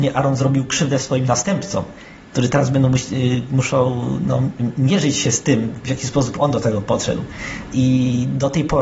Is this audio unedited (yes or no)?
yes